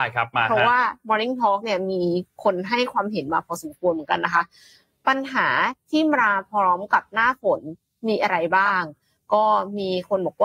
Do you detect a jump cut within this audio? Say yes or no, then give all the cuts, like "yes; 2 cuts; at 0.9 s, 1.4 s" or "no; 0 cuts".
no; 0 cuts